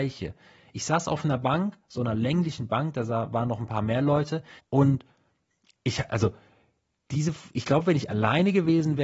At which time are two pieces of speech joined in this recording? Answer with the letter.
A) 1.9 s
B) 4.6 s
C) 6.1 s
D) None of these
B